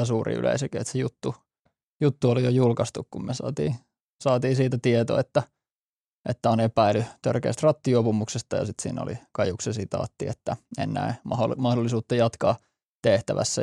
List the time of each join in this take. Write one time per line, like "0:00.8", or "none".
none

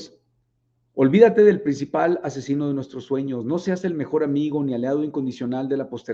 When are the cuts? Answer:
none

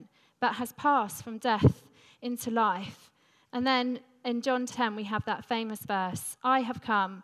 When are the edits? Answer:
0:04.7

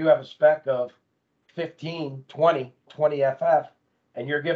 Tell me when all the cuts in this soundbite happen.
0:02.9

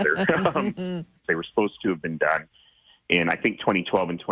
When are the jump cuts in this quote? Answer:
0:01.2

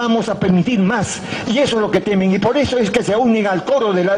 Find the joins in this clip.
none

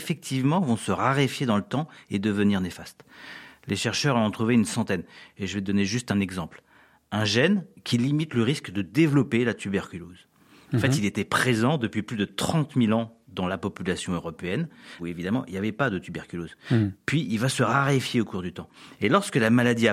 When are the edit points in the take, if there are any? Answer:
0:15.0

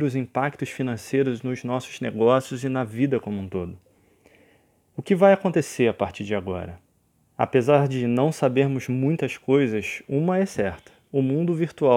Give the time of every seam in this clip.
none

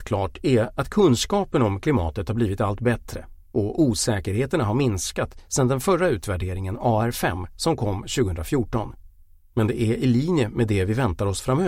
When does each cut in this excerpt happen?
0:09.5

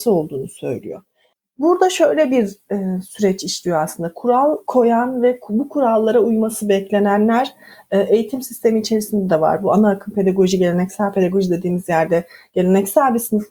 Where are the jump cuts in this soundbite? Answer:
none

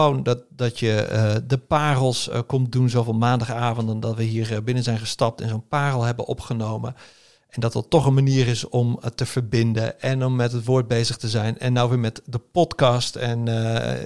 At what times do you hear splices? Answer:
none

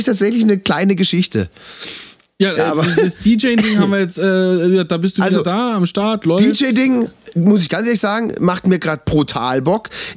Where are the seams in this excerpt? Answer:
0:02.5

